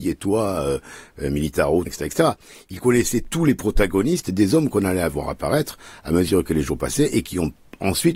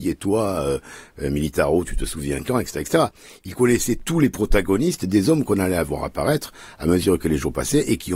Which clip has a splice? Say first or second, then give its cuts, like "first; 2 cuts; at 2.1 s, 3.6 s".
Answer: first; 1 cut; at 1.9 s